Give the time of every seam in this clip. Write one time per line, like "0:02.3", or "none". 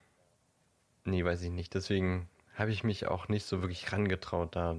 none